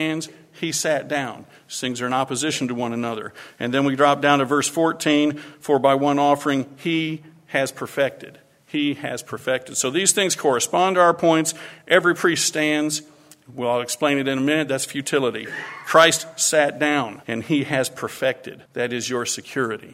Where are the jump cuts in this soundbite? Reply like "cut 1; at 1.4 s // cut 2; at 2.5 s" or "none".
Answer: cut 1; at 17.2 s // cut 2; at 18.7 s